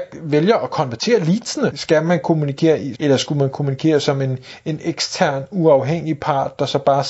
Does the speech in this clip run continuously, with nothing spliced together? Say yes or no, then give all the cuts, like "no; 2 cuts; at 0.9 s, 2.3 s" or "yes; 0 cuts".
no; 2 cuts; at 1.7 s, 2.9 s